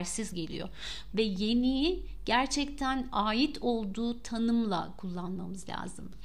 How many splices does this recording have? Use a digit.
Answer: 1